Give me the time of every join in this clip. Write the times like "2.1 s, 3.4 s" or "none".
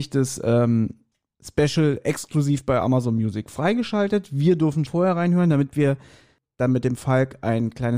4.9 s